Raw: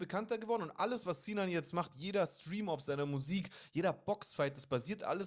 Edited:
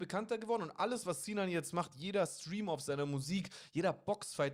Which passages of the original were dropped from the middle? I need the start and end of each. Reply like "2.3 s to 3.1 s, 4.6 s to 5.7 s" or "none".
none